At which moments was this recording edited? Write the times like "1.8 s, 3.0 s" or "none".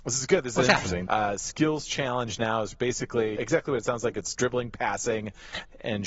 1.1 s, 3.4 s